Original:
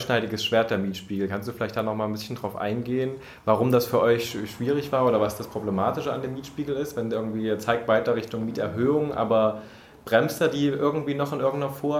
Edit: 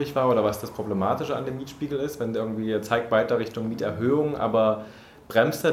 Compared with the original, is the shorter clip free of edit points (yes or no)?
yes